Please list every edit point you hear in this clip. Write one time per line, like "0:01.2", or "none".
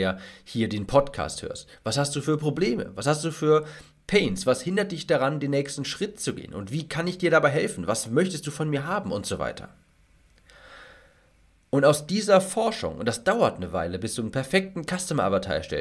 none